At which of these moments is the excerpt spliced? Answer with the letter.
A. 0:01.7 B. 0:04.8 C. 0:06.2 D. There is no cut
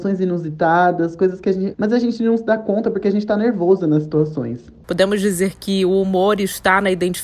A